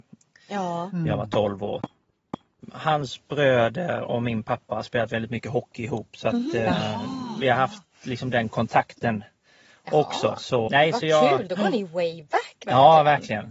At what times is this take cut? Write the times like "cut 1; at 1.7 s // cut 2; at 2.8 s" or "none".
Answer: cut 1; at 10.7 s

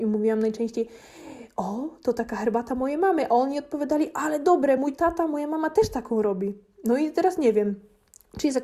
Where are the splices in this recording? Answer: none

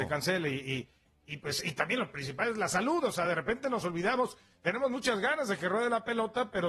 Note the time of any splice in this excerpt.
none

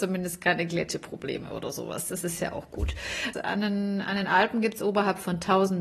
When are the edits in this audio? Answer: cut 1; at 3.3 s

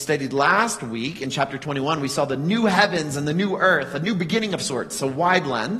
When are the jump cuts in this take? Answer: none

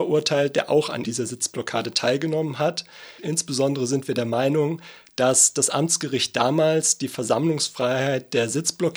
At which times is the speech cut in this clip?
cut 1; at 1.0 s // cut 2; at 3.2 s

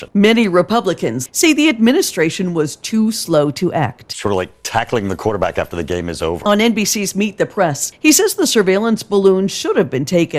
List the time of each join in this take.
cut 1; at 1.3 s

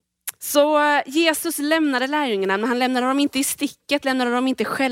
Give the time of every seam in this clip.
none

